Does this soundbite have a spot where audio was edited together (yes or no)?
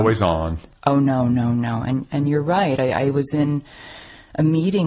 no